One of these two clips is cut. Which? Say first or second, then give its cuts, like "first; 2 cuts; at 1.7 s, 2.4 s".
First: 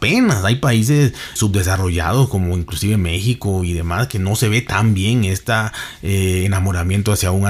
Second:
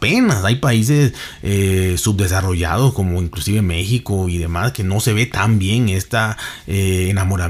first; 1 cut; at 1.4 s